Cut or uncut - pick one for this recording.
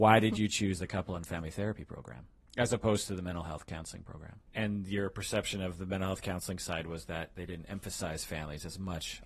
cut